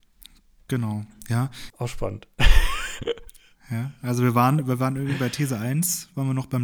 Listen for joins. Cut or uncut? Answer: cut